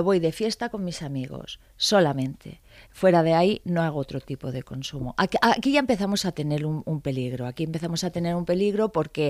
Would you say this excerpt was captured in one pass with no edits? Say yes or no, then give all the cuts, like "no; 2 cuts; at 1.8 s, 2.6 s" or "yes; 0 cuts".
yes; 0 cuts